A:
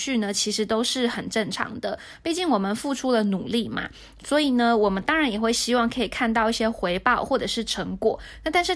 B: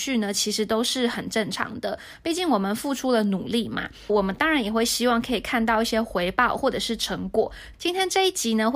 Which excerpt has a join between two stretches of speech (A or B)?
B